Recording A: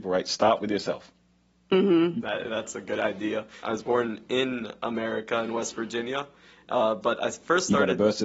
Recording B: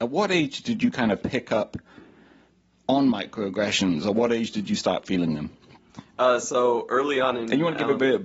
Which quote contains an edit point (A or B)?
A